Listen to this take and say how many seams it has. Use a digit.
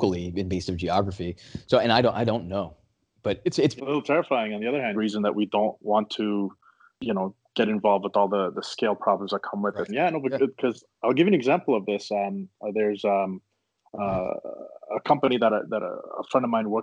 3